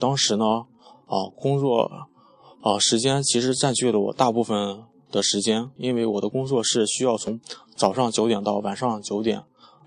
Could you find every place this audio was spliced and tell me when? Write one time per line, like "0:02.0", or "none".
none